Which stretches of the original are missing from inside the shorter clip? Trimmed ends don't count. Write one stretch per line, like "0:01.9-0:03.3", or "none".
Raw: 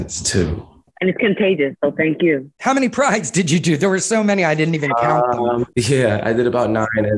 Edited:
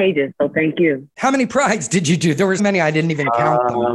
0:04.0-0:04.2